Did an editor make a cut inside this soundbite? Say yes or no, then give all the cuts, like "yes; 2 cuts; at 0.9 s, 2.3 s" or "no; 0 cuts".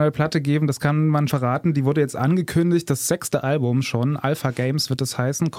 yes; 1 cut; at 1.3 s